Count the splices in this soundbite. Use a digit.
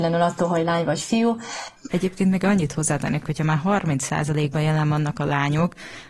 2